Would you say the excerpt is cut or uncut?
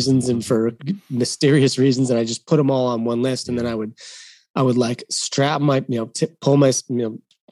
uncut